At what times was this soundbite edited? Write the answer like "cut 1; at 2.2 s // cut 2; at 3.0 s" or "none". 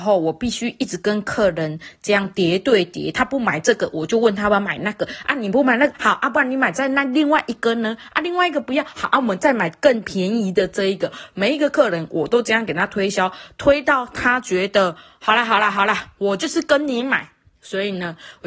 none